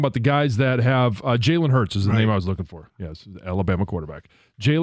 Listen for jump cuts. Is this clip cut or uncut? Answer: uncut